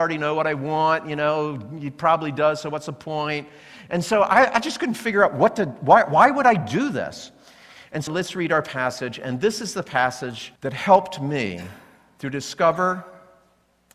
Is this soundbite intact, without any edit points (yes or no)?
no